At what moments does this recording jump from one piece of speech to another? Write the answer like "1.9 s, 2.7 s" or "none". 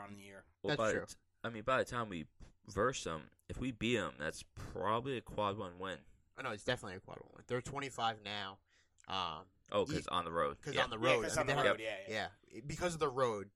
none